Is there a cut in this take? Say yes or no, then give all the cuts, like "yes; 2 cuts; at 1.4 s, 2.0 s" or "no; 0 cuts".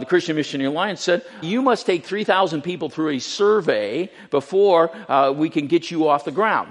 yes; 1 cut; at 1.4 s